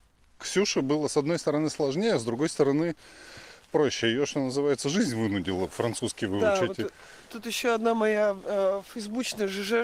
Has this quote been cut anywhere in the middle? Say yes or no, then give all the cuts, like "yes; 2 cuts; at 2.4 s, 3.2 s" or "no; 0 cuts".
no; 0 cuts